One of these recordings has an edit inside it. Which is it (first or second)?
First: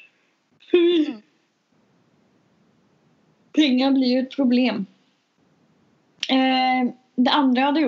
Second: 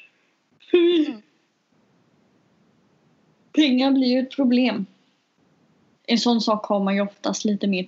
second